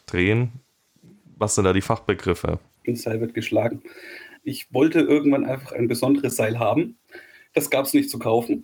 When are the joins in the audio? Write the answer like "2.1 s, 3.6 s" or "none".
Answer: 2.8 s, 4.4 s